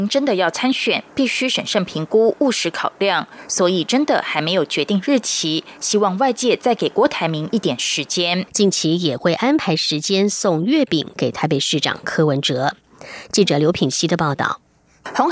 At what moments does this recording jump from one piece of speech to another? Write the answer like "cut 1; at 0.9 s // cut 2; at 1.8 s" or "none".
cut 1; at 8.5 s

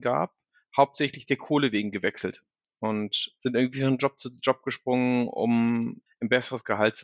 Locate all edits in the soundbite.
cut 1; at 3.4 s // cut 2; at 6.1 s

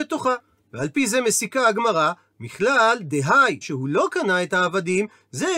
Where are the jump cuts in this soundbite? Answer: cut 1; at 3.6 s

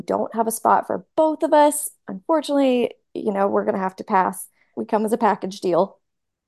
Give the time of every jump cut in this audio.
cut 1; at 4.7 s

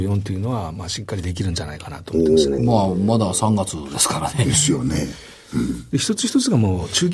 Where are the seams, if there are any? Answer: none

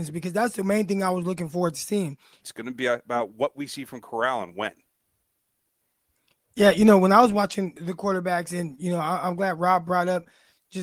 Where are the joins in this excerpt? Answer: cut 1; at 2.4 s // cut 2; at 7.8 s

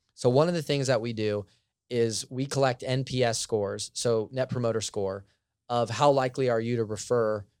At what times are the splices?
none

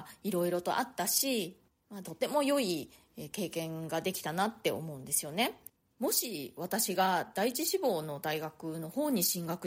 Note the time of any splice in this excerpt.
cut 1; at 2.0 s

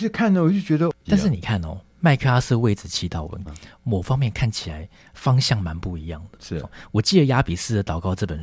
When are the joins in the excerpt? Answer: cut 1; at 1.1 s // cut 2; at 3.5 s

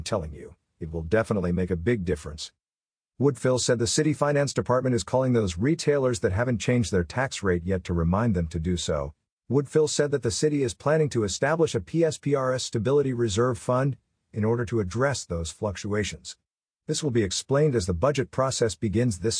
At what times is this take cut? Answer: cut 1; at 9.3 s

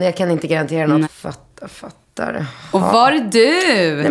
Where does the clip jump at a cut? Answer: cut 1; at 1.0 s

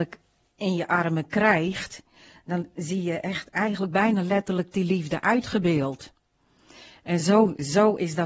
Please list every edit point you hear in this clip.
none

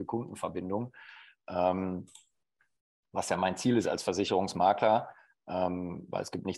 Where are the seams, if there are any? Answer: none

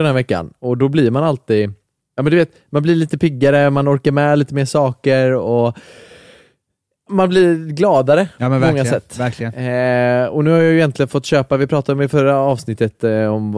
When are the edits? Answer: none

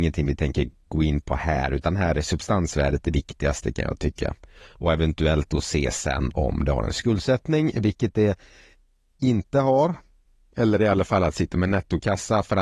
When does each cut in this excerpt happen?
none

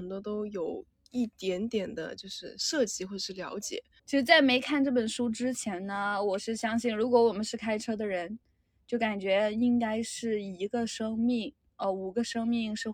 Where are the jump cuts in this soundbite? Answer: cut 1; at 4.0 s

